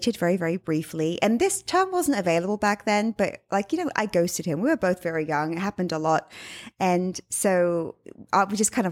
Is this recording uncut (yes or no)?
yes